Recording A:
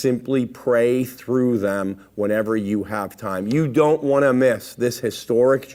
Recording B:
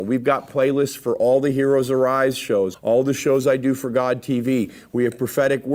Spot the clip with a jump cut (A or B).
B